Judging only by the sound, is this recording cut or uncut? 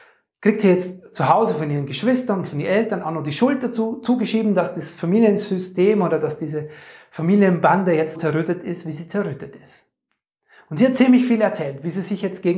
cut